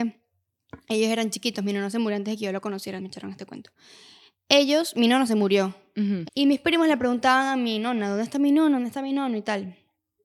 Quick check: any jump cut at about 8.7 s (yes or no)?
no